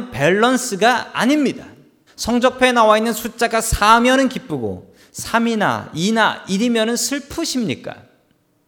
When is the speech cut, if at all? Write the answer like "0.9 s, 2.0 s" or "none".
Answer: 2.1 s